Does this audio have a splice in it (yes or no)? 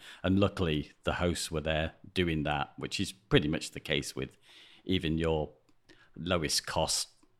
no